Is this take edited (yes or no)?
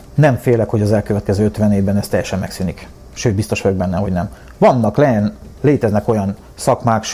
yes